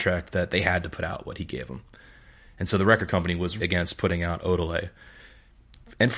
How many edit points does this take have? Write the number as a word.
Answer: one